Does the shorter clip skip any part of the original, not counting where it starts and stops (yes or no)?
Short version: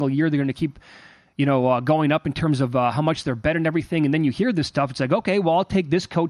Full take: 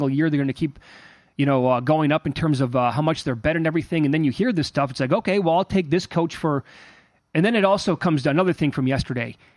no